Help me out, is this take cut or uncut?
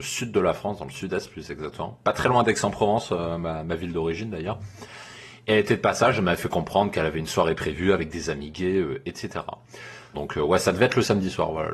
cut